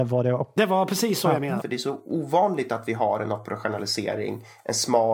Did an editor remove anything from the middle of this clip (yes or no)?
yes